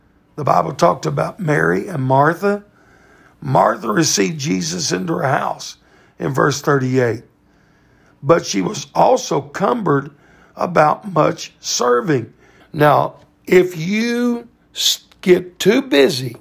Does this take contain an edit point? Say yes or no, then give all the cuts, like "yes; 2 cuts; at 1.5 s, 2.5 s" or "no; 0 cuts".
yes; 1 cut; at 12.6 s